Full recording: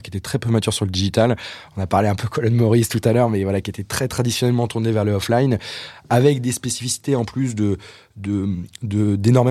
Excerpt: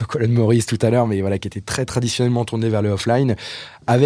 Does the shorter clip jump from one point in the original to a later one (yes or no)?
no